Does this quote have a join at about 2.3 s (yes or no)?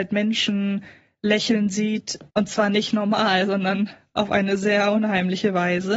yes